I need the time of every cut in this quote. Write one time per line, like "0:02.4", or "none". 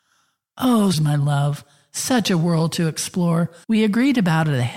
0:00.9
0:03.6